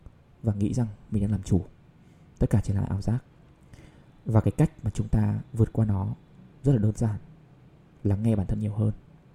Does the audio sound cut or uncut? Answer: uncut